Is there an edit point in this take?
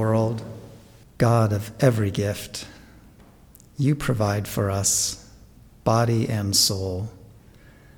yes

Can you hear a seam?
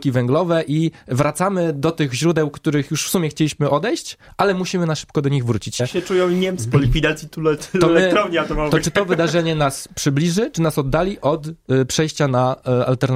yes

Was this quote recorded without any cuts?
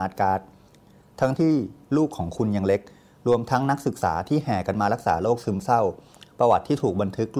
no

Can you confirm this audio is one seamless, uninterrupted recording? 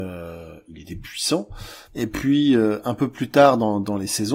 no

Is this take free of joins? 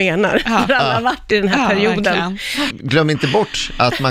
no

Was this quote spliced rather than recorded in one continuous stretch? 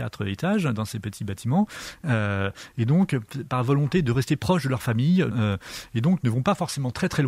yes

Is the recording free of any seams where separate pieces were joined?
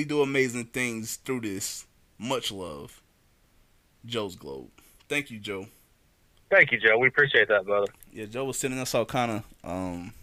no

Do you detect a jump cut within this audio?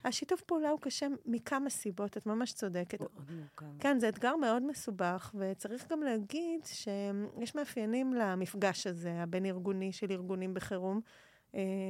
yes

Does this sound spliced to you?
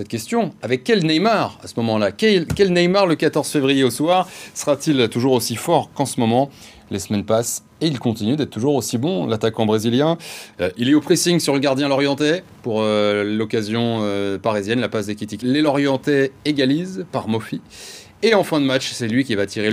yes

